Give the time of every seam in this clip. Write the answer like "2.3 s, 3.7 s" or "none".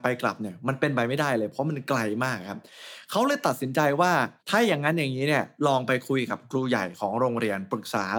4.4 s